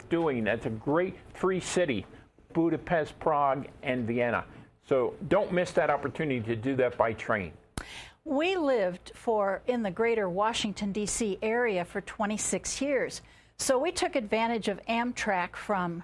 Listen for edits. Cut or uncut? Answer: uncut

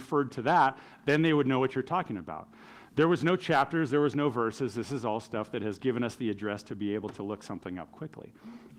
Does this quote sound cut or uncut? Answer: uncut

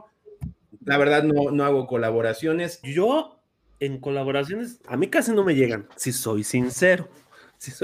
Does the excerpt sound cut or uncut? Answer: cut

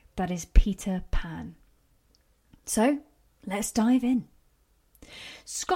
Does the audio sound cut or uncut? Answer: uncut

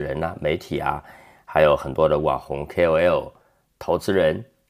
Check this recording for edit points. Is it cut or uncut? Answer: uncut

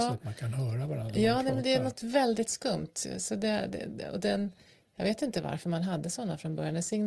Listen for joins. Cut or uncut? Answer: uncut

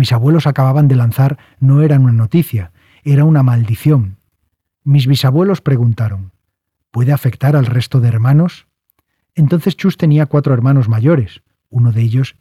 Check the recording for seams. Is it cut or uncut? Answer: uncut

